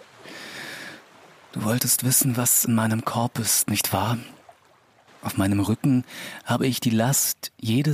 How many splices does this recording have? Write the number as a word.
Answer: one